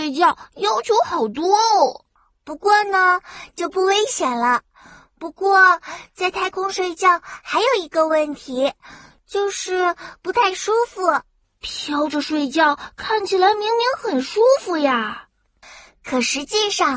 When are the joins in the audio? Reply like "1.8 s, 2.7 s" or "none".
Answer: 3.5 s